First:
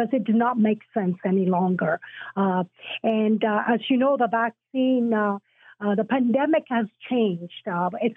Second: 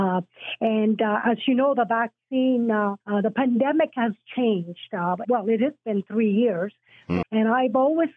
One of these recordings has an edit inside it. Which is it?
second; 3 cuts; at 3.0 s, 5.2 s, 7.2 s

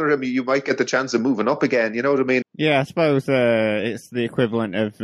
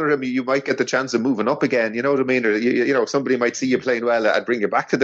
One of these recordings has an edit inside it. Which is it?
first; 1 cut; at 2.4 s

